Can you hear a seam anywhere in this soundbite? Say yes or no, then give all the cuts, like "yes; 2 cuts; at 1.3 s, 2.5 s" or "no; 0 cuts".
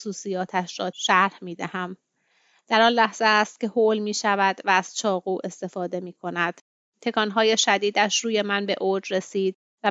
no; 0 cuts